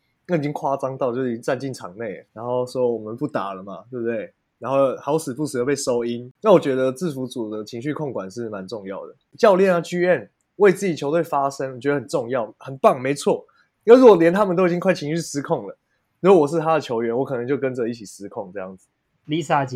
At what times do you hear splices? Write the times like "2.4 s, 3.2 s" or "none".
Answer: 2.3 s